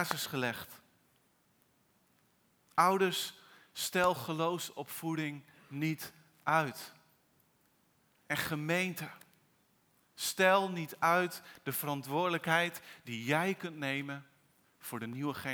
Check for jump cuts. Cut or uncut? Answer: uncut